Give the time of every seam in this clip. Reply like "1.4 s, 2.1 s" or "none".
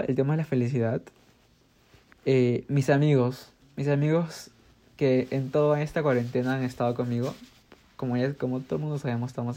2.1 s

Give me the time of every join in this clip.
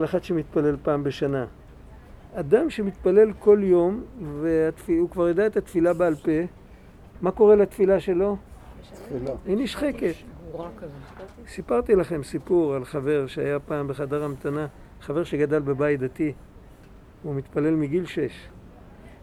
none

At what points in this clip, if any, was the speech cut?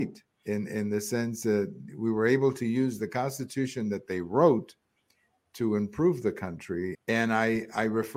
6.9 s

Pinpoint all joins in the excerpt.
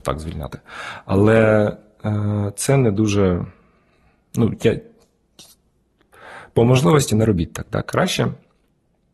none

